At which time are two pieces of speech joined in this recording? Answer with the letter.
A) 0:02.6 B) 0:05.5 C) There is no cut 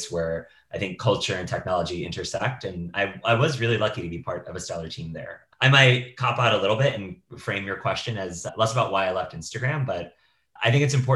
C